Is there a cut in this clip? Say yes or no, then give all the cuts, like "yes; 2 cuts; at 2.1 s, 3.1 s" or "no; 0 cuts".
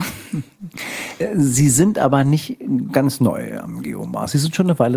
no; 0 cuts